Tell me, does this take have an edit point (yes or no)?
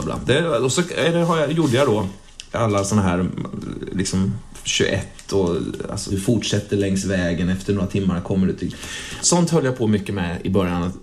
yes